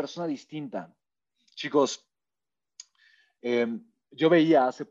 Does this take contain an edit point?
no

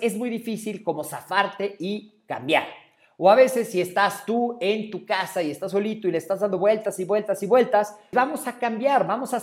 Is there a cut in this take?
yes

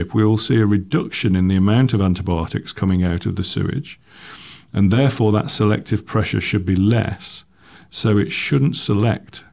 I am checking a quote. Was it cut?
no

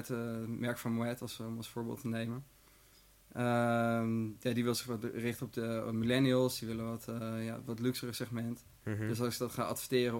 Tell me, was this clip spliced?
no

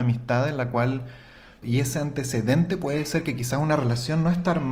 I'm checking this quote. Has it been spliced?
yes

